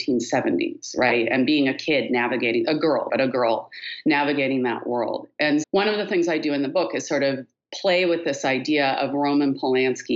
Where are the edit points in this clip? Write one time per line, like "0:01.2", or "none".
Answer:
0:03.1
0:05.6